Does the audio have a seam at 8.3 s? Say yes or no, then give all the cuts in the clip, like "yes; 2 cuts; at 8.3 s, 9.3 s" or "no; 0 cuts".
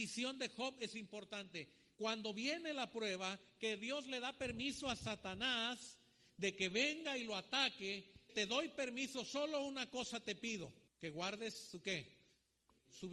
yes; 2 cuts; at 8.3 s, 10.9 s